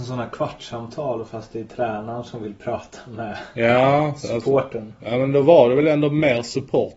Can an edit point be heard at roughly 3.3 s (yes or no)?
no